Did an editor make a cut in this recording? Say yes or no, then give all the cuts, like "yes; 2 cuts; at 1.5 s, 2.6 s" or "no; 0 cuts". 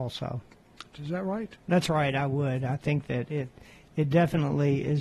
yes; 1 cut; at 0.9 s